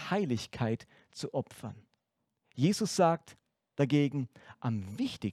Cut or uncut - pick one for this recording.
uncut